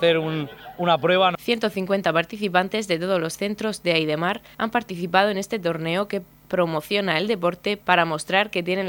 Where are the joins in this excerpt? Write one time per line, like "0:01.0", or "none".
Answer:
0:01.3